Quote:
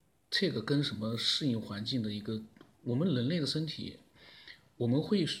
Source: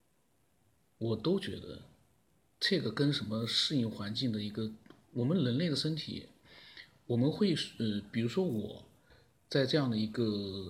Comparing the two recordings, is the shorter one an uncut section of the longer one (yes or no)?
yes